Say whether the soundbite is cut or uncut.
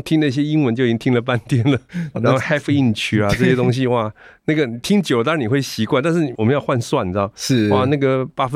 cut